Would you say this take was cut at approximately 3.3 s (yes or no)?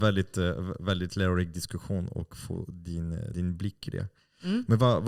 yes